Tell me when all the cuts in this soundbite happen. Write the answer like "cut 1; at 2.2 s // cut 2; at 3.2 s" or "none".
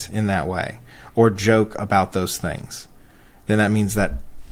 none

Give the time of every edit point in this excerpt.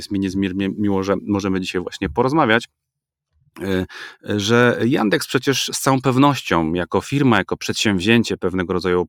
none

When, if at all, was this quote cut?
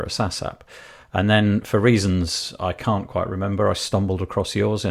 none

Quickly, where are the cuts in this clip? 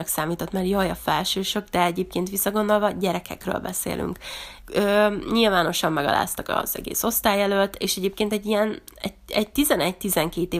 cut 1; at 4.6 s

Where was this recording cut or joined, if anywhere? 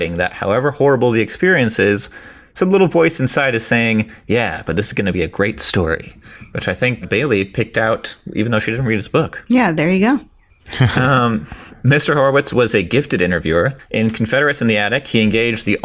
cut 1; at 7.0 s

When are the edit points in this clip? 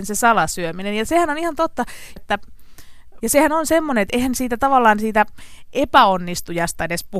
cut 1; at 2.2 s // cut 2; at 3.2 s

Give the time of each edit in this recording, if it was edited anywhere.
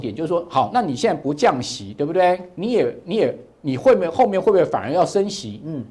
none

